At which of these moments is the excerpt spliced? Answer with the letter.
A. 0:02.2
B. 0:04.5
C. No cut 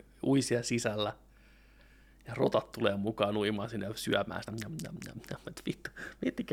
C